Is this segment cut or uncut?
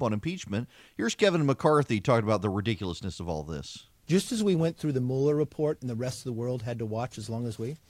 uncut